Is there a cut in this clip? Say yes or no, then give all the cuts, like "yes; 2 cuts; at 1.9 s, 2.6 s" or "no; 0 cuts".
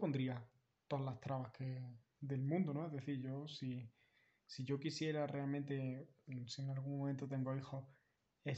no; 0 cuts